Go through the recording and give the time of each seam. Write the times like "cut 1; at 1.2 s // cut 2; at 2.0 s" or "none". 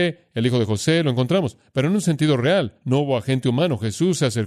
none